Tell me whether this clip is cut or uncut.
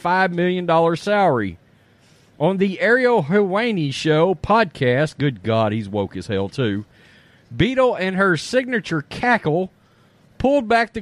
uncut